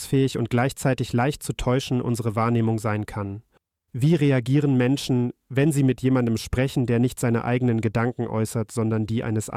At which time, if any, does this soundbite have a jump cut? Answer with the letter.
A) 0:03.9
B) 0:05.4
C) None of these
A